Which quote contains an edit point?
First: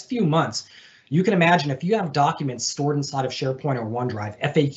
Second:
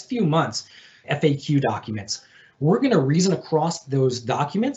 second; 1 cut; at 1.0 s

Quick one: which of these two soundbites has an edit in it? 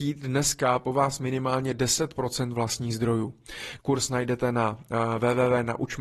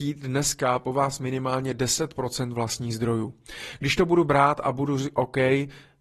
first; 1 cut; at 3.8 s

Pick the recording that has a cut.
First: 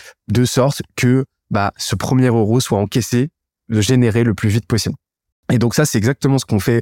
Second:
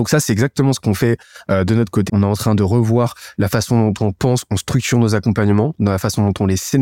second; 1 cut; at 2.1 s

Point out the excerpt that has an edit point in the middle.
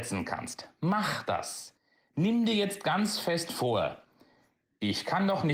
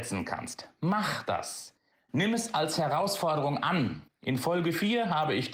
second; 2 cuts; at 1.9 s, 4.1 s

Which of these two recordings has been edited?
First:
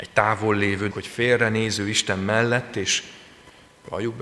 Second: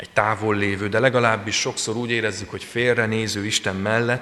first; 1 cut; at 0.9 s

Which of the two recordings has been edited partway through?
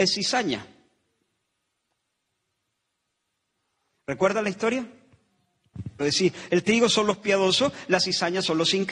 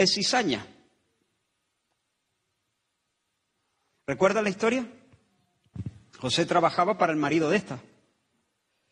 first; 1 cut; at 6.0 s

